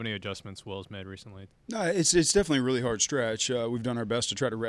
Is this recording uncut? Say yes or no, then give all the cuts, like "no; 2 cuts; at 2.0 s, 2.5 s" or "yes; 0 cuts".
no; 1 cut; at 1.5 s